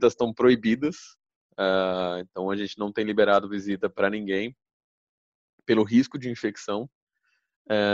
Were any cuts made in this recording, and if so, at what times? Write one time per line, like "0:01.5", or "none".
none